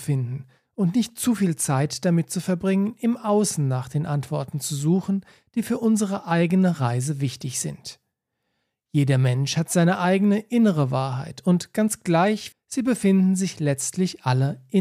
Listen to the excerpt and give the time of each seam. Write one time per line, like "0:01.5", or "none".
0:12.5